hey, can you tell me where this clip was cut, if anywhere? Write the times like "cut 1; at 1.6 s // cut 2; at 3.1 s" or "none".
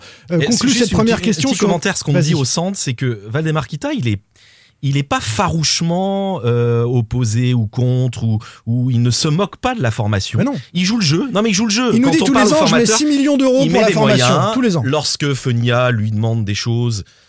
none